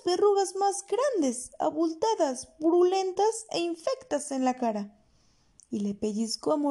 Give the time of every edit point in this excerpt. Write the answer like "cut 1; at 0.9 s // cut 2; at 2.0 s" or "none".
none

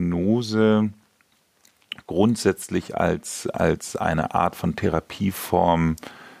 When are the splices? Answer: none

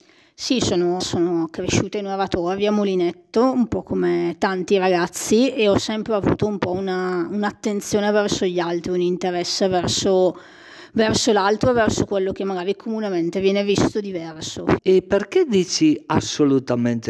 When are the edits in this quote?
cut 1; at 1.0 s // cut 2; at 14.8 s

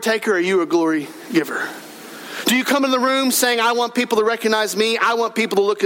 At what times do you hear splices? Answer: none

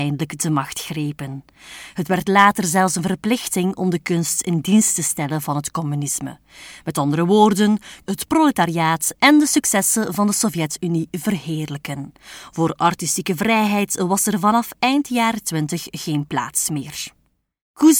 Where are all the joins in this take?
cut 1; at 8.1 s

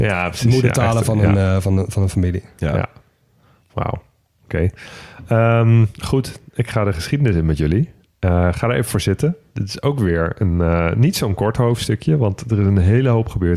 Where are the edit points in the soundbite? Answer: none

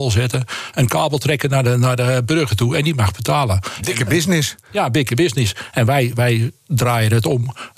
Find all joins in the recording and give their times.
none

